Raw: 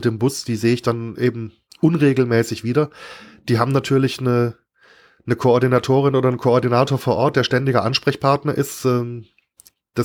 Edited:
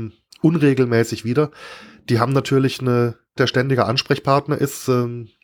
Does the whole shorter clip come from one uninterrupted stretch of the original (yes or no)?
no